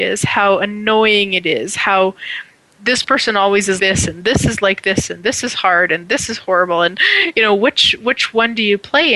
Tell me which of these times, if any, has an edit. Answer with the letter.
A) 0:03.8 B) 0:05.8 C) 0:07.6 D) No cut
A